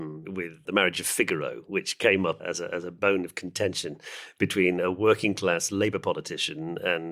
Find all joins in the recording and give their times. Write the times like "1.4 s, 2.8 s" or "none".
none